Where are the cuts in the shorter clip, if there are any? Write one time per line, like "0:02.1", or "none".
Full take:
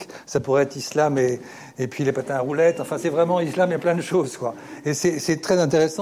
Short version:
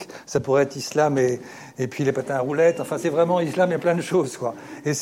none

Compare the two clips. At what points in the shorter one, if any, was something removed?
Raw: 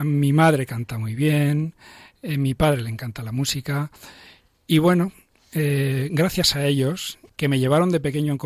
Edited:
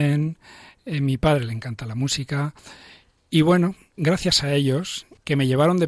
0:04.0

